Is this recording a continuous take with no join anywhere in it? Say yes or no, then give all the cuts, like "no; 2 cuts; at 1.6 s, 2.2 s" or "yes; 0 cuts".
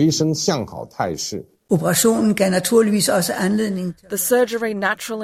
no; 1 cut; at 1.7 s